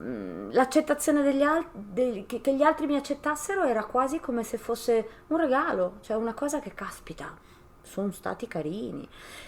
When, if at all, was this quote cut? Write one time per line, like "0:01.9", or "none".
none